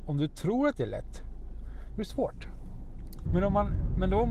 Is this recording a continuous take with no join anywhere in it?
no; 1 cut; at 3.3 s

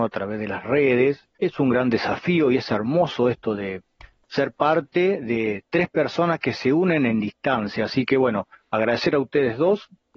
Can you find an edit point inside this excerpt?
yes; 2 cuts; at 1.3 s, 4.2 s

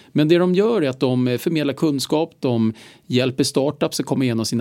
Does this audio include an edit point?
no; 0 cuts

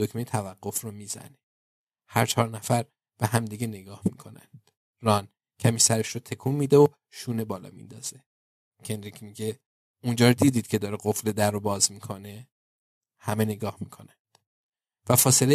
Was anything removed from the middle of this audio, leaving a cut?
no; 0 cuts

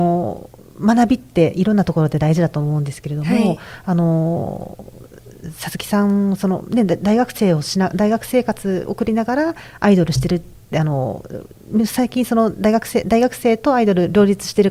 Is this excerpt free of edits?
yes; 0 cuts

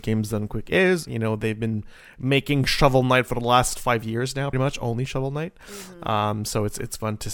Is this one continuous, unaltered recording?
no; 2 cuts; at 1.1 s, 4.5 s

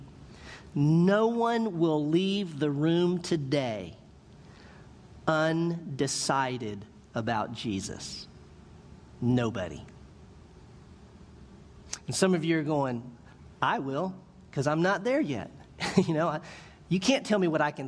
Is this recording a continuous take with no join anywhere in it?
yes; 0 cuts

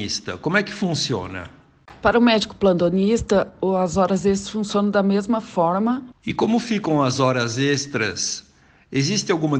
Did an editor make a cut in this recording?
yes; 1 cut; at 6.1 s

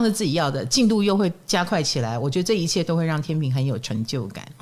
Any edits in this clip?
no; 0 cuts

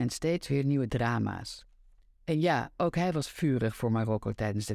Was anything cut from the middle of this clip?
no; 0 cuts

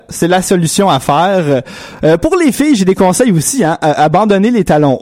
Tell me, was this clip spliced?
no; 0 cuts

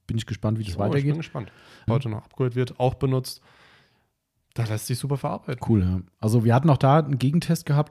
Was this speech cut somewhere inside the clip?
yes; 1 cut; at 1.9 s

